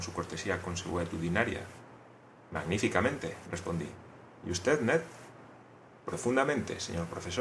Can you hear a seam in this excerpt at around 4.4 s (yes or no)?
no